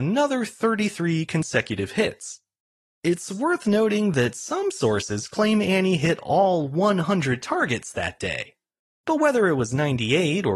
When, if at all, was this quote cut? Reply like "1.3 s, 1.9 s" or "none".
none